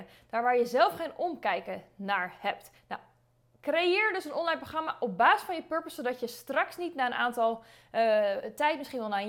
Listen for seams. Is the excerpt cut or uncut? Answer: cut